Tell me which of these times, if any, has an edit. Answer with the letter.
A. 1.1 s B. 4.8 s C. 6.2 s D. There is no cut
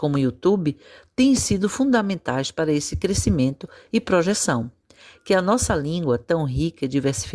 D